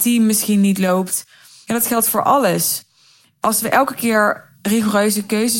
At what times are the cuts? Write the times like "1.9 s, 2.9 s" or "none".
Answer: none